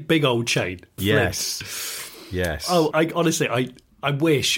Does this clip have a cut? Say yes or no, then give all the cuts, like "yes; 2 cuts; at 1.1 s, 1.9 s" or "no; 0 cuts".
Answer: yes; 2 cuts; at 1.0 s, 2.9 s